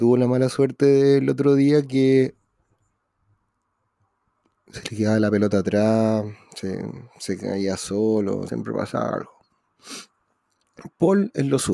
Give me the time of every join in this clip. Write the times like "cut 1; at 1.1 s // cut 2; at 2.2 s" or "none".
cut 1; at 8.5 s